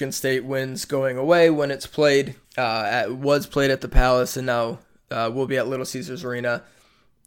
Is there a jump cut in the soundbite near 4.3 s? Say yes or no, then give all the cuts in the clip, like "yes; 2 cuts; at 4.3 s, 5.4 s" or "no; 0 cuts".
no; 1 cut; at 2.4 s